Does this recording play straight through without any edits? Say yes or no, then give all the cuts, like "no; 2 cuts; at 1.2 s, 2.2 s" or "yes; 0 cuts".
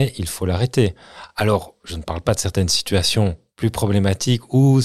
yes; 0 cuts